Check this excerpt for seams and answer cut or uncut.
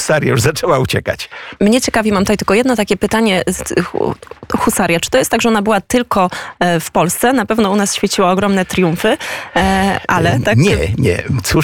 cut